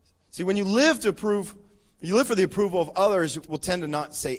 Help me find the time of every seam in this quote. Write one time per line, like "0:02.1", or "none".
0:03.4